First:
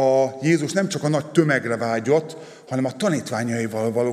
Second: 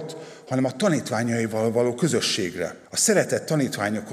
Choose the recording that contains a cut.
second; 1 cut; at 2.8 s

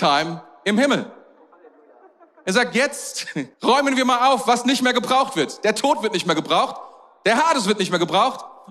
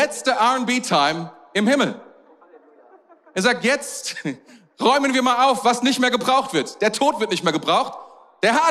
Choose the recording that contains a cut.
first; 1 cut; at 3.5 s

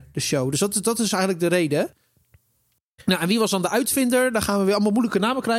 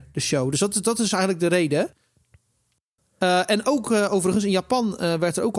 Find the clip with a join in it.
second; 1 cut; at 3.0 s

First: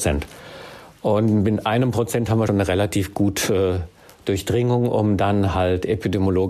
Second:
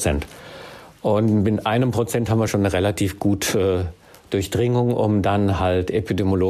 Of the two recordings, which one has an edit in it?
first; 1 cut; at 2.5 s

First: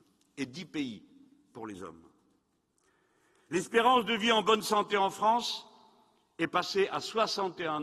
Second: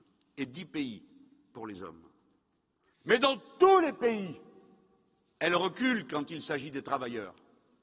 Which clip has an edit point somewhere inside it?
second; 1 cut; at 2.9 s

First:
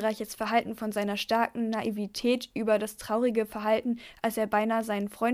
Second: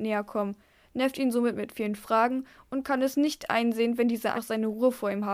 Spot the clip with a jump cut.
second; 1 cut; at 4.3 s

